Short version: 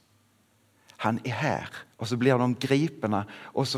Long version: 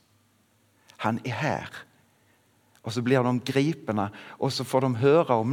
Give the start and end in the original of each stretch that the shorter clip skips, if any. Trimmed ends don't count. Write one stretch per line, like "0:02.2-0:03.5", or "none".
0:01.9-0:02.8